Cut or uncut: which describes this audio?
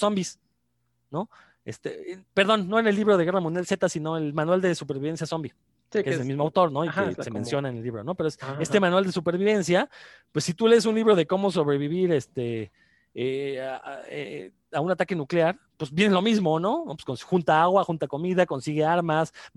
uncut